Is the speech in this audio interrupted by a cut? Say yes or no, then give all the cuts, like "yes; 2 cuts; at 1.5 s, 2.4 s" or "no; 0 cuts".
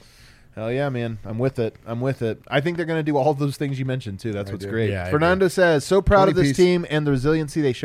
no; 0 cuts